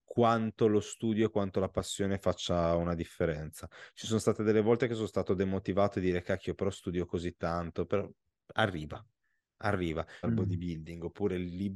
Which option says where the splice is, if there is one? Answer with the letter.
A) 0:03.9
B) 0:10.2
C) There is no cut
B